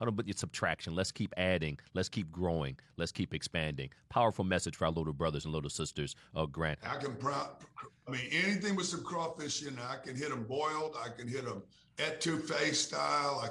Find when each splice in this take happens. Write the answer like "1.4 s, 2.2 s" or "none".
6.8 s